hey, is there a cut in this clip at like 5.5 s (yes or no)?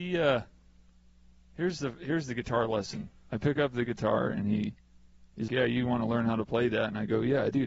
yes